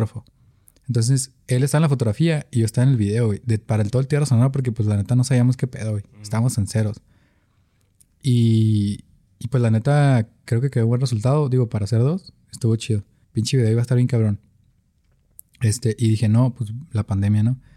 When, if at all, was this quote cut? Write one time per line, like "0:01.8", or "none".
0:13.2